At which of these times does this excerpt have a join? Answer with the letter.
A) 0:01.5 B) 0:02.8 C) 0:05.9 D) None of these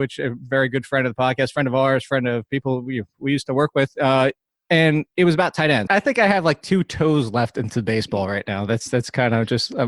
C